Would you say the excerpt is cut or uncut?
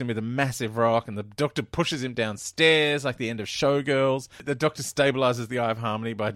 uncut